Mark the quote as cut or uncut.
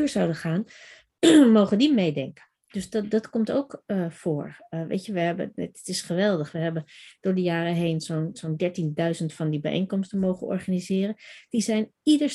uncut